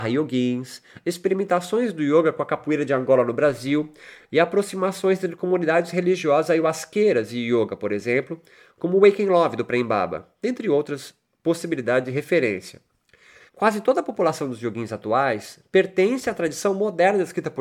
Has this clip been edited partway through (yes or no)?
yes